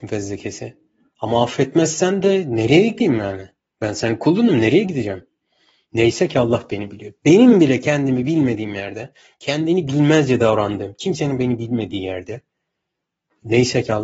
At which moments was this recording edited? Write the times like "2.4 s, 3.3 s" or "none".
none